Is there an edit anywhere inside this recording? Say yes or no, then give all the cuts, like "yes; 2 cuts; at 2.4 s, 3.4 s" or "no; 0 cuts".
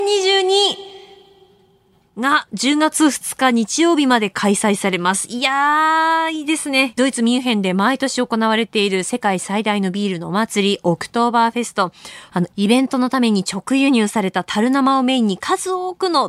yes; 2 cuts; at 6.9 s, 12.3 s